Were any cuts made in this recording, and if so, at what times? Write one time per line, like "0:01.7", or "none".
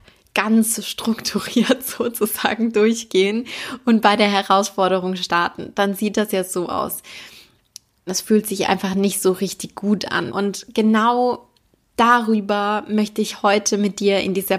0:08.1
0:10.3